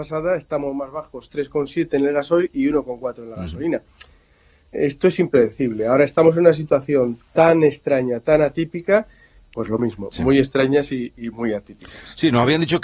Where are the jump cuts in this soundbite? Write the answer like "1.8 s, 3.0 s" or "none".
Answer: 9.5 s

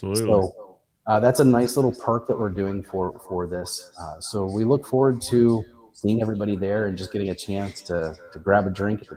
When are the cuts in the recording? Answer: none

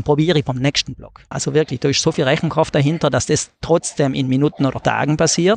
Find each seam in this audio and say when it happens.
1.3 s

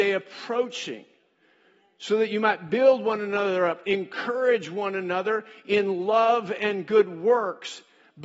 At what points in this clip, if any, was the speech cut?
none

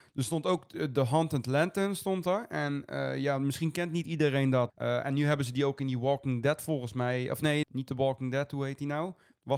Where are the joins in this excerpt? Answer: 4.7 s, 7.6 s

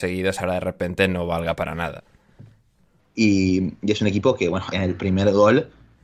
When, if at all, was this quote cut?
3.0 s, 4.7 s

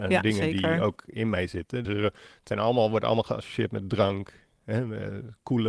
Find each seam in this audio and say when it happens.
1.8 s

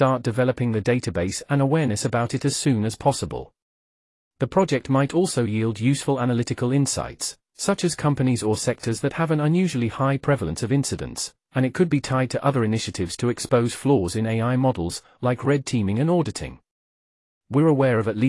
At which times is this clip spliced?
none

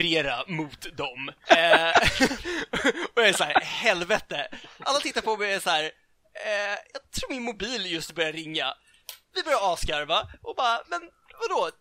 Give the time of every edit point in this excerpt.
1.4 s

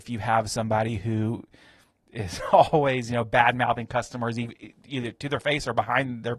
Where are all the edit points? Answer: none

